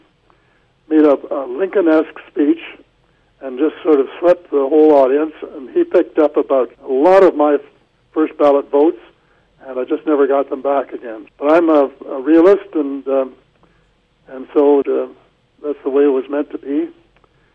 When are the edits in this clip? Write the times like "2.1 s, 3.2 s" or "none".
6.7 s, 11.3 s, 14.8 s